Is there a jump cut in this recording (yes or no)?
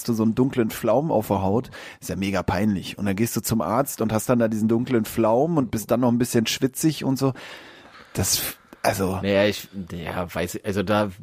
no